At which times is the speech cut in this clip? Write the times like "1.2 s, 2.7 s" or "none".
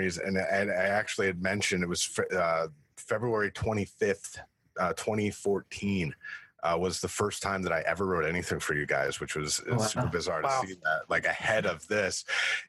none